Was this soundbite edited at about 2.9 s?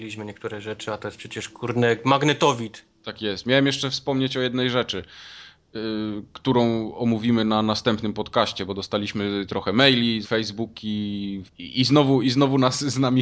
no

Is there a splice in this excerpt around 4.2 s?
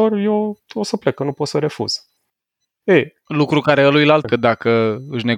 yes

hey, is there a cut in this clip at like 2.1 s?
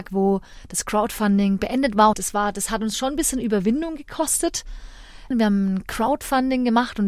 yes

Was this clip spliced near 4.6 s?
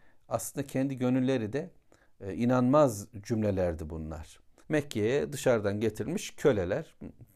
yes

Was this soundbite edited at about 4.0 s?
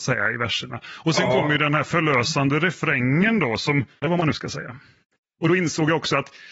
yes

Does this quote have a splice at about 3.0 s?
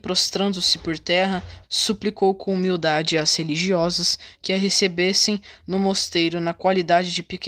no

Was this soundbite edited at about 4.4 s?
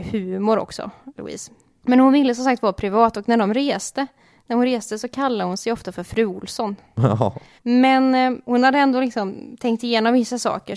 no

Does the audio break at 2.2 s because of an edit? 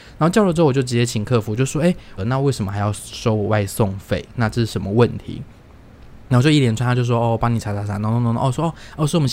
yes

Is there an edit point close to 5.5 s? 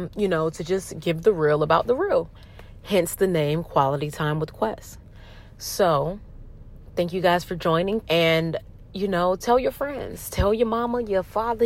no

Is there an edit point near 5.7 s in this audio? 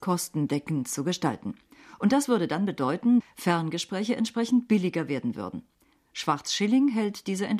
no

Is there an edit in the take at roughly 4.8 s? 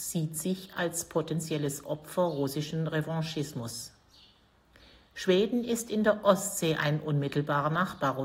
no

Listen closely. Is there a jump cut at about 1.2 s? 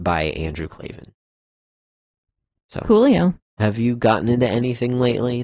no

